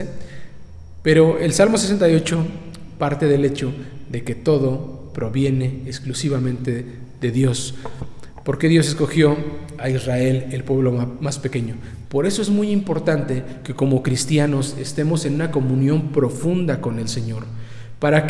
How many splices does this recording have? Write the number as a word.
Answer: one